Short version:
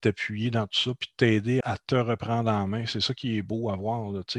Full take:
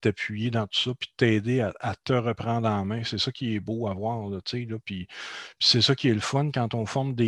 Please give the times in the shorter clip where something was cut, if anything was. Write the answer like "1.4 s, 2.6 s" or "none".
1.6 s